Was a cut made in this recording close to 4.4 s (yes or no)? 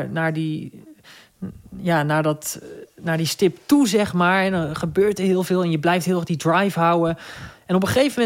no